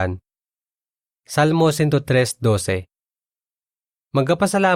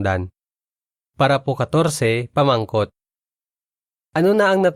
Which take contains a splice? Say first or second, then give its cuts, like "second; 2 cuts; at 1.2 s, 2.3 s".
second; 1 cut; at 1.0 s